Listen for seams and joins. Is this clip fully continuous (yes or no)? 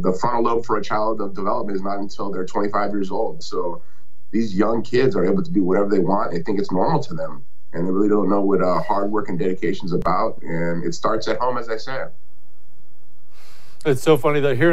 yes